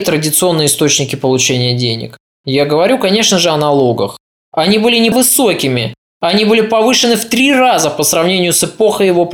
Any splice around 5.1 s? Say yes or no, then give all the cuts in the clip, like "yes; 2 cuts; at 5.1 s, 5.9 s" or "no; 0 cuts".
yes; 1 cut; at 5.1 s